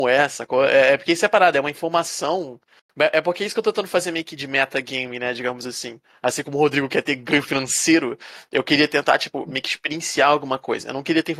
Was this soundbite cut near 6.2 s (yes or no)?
no